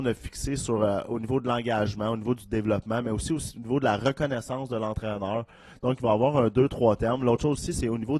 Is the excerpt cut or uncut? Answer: uncut